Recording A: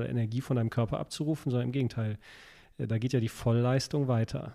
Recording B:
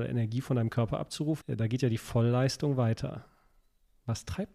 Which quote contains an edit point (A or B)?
B